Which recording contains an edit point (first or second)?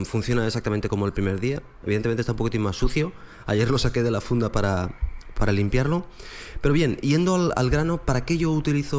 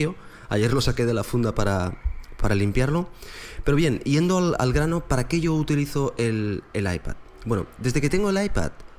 first